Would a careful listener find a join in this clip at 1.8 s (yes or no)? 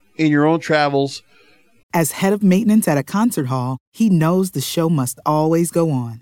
yes